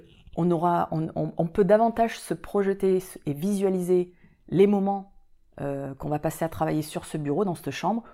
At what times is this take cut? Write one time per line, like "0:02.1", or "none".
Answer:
none

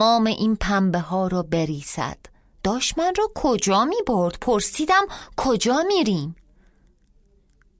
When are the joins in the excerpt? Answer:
none

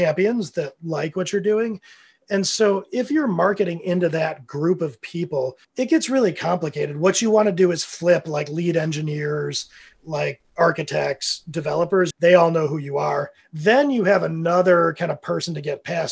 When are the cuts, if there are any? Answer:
0:12.1

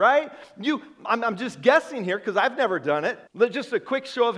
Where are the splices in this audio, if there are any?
0:03.3

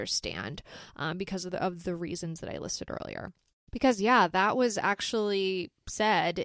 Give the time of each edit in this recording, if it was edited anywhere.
0:03.7

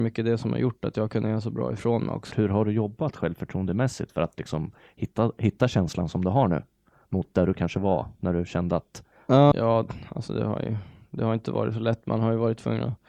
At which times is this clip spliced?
0:02.3
0:09.5

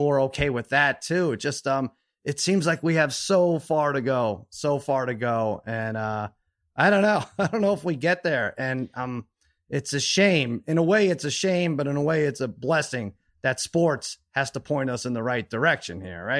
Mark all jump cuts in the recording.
none

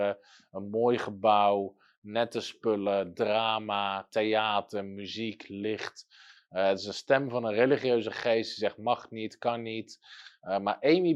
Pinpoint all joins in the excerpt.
none

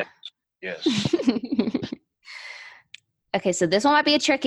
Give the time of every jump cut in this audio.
none

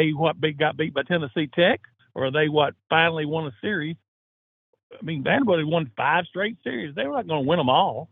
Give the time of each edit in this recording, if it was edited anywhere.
none

